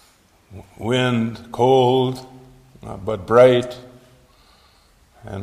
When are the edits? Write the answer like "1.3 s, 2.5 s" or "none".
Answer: none